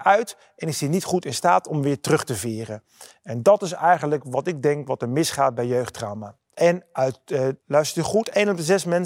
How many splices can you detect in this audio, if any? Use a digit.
2